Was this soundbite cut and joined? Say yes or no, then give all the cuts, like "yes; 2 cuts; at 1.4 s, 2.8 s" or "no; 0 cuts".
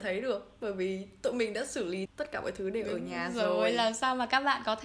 yes; 1 cut; at 2.1 s